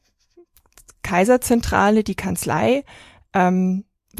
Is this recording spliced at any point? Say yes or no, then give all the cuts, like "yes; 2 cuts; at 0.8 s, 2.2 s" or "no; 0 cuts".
no; 0 cuts